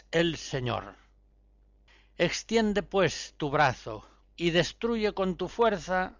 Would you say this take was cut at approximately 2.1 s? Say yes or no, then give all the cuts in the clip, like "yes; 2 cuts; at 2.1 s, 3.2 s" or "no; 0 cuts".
no; 1 cut; at 4.2 s